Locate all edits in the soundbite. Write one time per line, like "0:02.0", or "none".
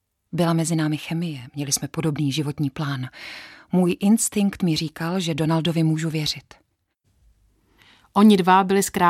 none